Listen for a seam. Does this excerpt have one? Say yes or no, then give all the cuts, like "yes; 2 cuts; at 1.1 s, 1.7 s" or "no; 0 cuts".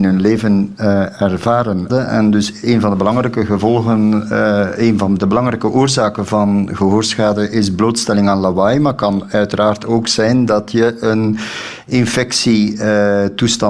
yes; 1 cut; at 1.9 s